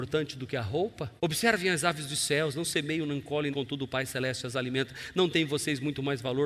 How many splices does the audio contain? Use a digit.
2